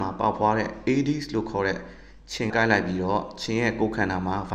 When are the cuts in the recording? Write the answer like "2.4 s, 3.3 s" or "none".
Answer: 2.5 s